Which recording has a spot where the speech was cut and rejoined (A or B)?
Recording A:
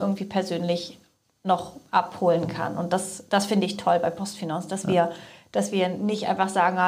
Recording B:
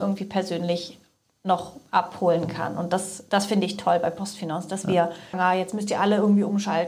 B